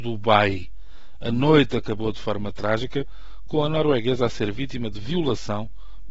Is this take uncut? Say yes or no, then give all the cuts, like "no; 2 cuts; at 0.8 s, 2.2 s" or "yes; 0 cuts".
yes; 0 cuts